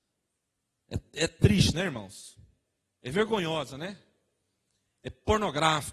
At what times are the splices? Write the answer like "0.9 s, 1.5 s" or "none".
none

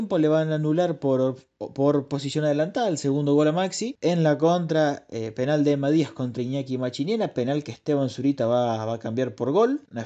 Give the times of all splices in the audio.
none

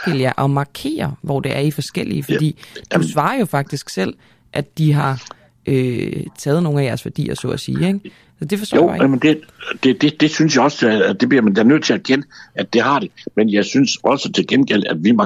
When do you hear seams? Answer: none

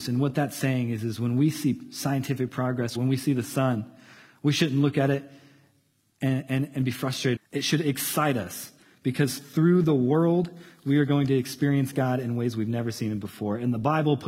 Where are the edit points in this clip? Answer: 3.0 s, 7.4 s

